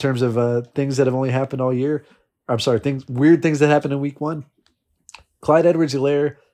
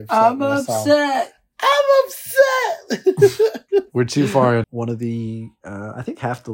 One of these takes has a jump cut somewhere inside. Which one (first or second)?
second